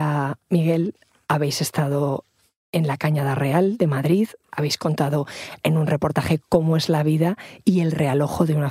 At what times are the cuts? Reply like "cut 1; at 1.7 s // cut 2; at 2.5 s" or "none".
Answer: none